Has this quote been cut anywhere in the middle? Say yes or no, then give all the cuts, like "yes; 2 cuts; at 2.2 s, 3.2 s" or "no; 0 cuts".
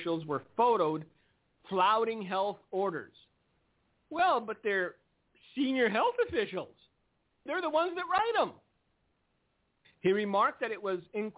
yes; 2 cuts; at 7.5 s, 9.8 s